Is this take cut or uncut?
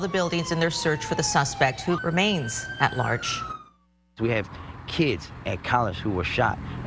cut